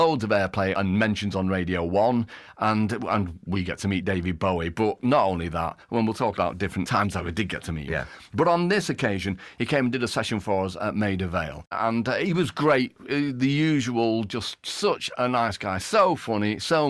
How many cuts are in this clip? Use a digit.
0